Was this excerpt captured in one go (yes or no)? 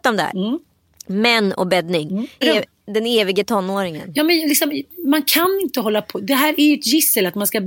no